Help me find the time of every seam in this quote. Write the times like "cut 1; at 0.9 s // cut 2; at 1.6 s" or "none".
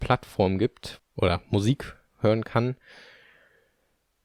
cut 1; at 1.0 s